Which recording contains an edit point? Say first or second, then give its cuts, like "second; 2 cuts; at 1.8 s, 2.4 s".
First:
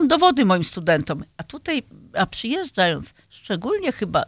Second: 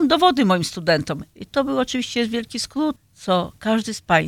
second; 2 cuts; at 1.3 s, 3.0 s